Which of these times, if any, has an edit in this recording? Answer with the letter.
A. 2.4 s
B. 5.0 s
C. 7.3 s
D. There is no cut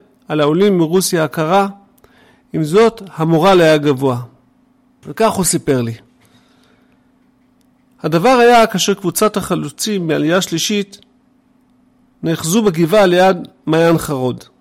B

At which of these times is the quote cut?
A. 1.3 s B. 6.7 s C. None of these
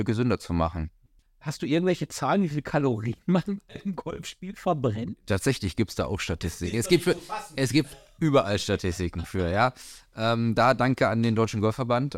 C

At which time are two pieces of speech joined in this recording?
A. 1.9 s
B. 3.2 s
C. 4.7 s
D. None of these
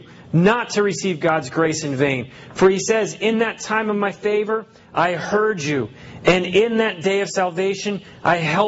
D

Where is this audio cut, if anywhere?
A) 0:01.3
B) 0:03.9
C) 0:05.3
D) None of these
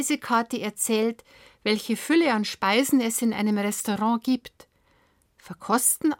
D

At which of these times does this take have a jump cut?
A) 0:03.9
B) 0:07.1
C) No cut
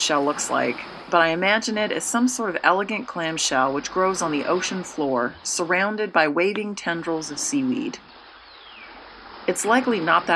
C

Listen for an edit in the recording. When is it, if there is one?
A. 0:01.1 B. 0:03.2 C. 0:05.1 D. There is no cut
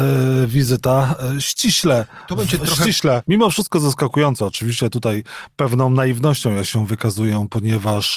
B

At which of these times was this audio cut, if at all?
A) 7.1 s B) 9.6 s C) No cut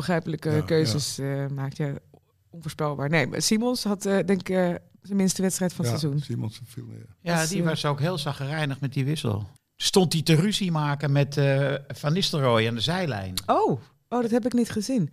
B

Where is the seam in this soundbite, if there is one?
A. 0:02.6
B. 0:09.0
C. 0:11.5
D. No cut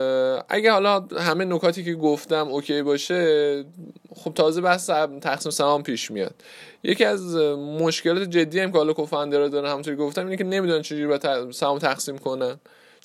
D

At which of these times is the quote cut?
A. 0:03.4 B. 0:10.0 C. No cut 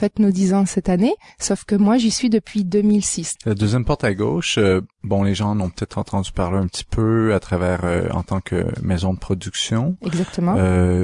A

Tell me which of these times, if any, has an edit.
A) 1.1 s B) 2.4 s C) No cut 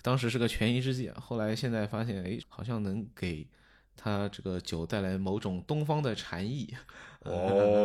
B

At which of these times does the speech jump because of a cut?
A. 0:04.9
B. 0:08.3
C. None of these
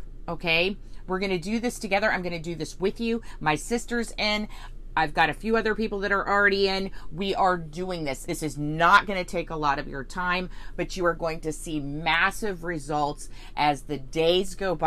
B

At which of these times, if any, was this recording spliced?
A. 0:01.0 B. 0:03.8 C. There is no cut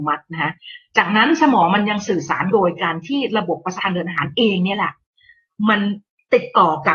B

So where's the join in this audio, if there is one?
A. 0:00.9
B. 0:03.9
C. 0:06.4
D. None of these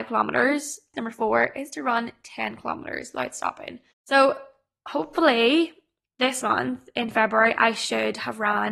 A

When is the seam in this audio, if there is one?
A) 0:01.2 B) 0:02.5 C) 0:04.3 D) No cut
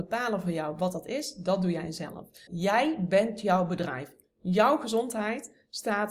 B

